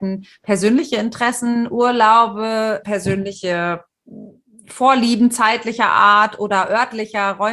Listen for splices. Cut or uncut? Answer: cut